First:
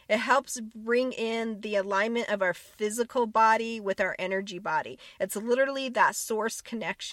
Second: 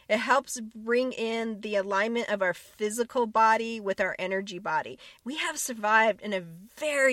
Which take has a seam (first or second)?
second